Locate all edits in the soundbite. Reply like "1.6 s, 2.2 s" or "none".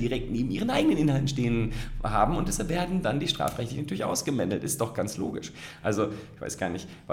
none